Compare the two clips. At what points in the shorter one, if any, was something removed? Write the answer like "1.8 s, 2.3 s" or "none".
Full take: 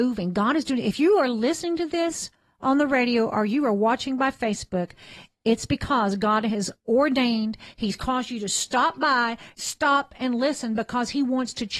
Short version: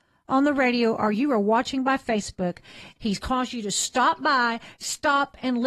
3.0 s